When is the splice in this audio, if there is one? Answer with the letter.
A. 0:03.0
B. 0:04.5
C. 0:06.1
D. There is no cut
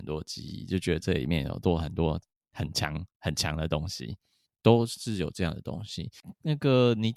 B